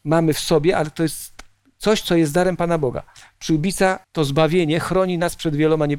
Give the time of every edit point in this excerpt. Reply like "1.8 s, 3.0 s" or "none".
4.0 s